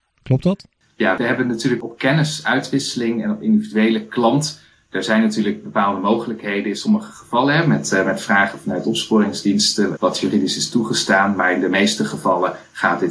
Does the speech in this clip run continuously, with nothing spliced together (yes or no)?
no